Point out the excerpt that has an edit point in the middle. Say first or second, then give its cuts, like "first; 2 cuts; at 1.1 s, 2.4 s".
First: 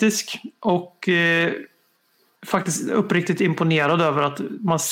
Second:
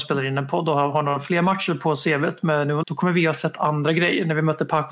second; 1 cut; at 2.8 s